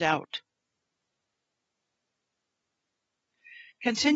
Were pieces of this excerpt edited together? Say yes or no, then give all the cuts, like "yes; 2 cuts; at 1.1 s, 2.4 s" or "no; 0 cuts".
no; 0 cuts